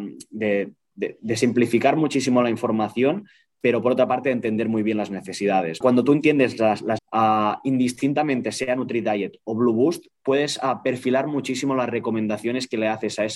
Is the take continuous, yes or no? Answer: no